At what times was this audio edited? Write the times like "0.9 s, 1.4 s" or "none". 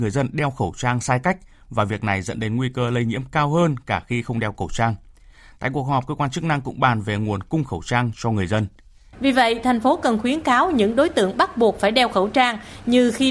9.1 s